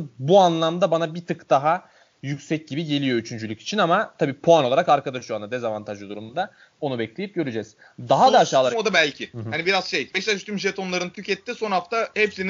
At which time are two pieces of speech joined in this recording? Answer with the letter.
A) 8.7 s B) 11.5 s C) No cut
A